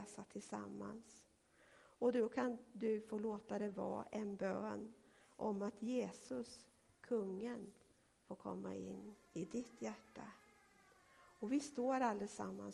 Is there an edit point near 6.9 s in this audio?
no; 0 cuts

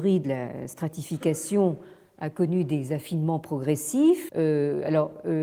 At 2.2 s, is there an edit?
no; 1 cut; at 4.3 s

